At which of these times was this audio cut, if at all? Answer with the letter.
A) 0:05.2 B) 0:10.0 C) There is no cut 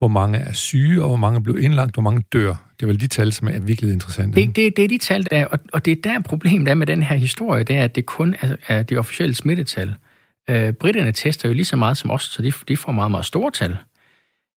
A